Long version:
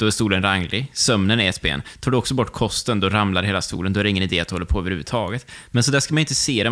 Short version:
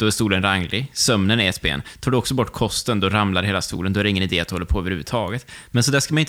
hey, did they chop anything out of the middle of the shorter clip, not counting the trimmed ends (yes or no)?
no